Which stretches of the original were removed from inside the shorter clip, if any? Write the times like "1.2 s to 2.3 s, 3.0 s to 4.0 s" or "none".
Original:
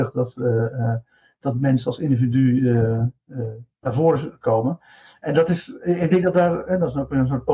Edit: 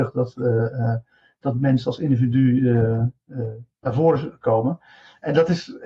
none